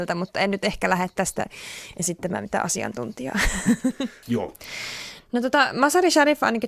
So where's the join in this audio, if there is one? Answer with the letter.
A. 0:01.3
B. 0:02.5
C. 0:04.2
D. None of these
C